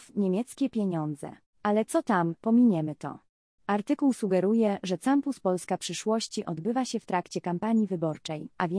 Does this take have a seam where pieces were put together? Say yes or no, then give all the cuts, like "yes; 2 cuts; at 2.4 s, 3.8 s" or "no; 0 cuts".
yes; 2 cuts; at 1.5 s, 3.6 s